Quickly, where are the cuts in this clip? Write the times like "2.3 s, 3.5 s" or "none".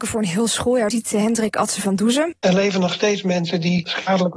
0.9 s, 2.3 s